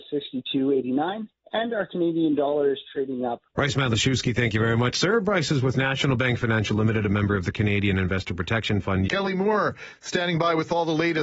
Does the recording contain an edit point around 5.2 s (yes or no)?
no